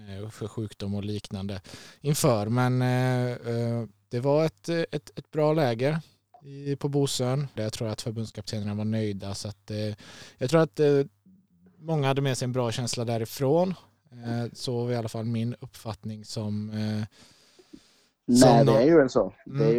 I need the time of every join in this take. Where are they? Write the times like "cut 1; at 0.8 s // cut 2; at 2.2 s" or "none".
cut 1; at 7.6 s